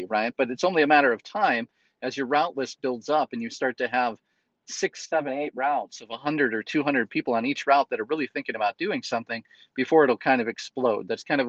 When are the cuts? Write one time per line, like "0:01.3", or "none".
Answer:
none